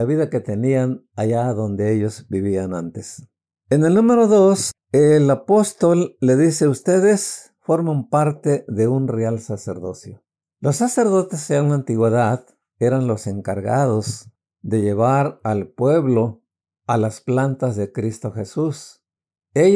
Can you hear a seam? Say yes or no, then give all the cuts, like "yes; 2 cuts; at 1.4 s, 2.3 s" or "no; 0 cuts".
no; 0 cuts